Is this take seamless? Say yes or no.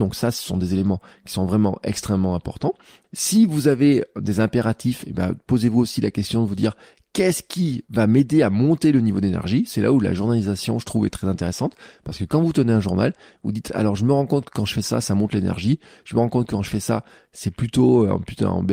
no